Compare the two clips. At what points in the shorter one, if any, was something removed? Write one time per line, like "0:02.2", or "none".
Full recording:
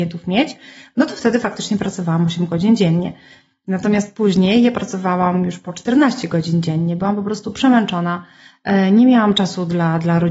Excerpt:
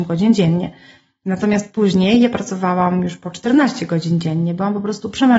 none